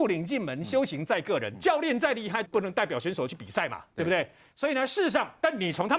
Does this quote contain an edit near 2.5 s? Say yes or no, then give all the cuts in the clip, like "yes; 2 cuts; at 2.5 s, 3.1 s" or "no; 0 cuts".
yes; 1 cut; at 2.5 s